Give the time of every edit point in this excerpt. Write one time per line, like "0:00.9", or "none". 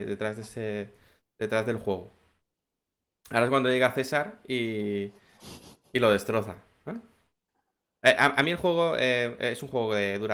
none